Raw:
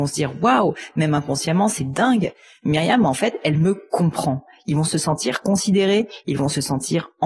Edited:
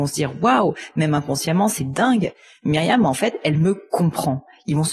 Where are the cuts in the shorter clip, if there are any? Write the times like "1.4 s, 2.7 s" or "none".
none